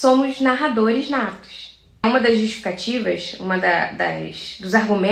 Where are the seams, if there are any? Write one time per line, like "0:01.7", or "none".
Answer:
0:02.0